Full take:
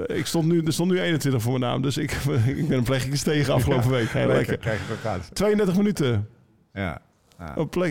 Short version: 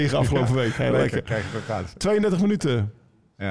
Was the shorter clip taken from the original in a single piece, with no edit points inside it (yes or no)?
yes